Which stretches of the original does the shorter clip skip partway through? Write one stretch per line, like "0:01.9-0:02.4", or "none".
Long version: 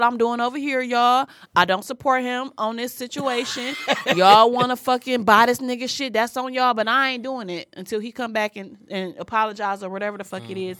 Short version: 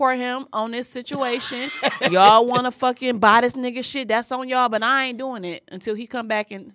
none